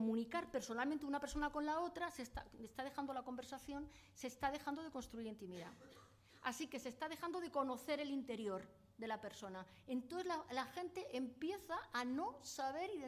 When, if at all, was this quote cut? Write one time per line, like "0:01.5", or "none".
none